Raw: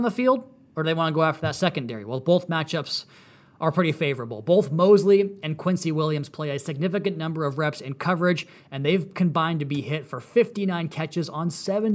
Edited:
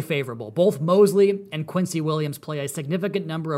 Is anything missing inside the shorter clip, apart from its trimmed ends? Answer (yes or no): no